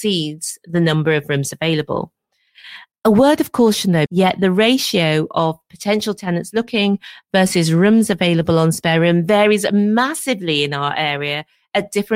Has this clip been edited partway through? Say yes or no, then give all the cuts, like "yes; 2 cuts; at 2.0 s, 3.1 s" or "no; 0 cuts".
yes; 1 cut; at 4.1 s